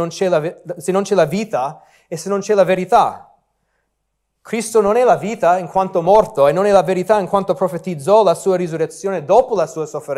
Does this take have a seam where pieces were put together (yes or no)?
no